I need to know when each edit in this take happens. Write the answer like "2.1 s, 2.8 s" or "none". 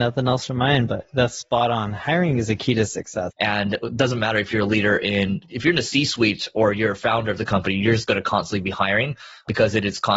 3.3 s